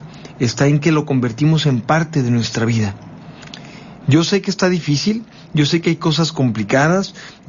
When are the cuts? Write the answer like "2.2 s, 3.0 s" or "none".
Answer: 4.0 s